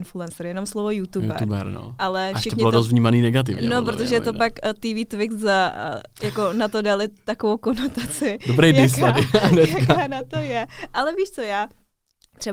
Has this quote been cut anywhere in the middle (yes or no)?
no